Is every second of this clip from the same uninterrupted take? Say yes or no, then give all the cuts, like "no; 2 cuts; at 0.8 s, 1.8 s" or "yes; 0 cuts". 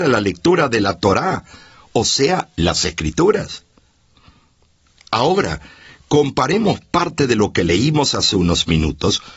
yes; 0 cuts